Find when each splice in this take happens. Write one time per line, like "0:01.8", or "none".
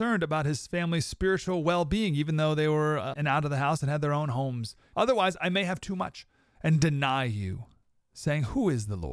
0:03.1
0:04.9